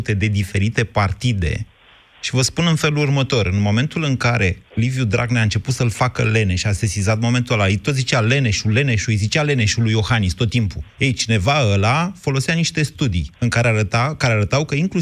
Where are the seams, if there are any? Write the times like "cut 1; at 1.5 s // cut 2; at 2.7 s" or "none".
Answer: cut 1; at 11.0 s